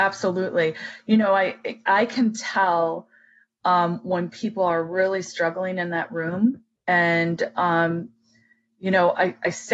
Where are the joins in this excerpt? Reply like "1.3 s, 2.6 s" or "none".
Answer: none